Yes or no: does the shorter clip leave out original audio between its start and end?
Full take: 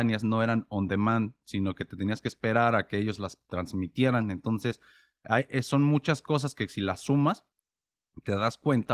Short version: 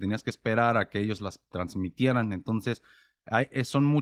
no